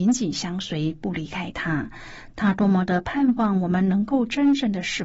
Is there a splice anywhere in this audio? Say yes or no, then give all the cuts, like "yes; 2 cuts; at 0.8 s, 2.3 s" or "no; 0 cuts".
no; 0 cuts